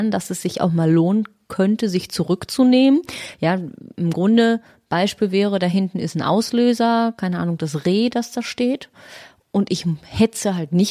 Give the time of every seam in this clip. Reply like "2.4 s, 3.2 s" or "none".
3.3 s